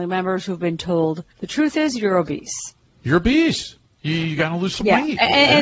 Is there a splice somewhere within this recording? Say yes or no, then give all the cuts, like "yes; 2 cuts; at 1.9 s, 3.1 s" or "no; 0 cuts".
yes; 1 cut; at 1.3 s